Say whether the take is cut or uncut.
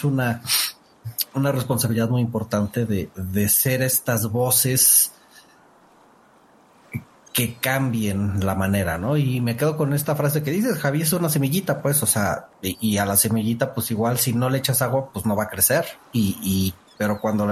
uncut